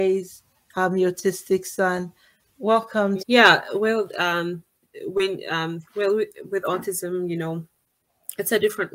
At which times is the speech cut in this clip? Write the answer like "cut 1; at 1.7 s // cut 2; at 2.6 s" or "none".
cut 1; at 3.2 s